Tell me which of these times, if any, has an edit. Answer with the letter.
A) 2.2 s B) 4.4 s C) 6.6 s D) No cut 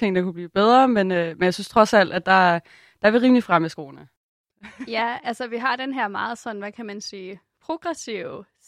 A